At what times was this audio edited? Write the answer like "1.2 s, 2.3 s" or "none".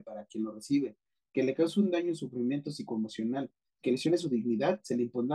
none